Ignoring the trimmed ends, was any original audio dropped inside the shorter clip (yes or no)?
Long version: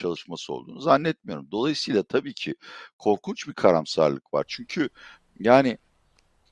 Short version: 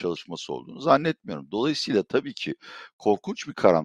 no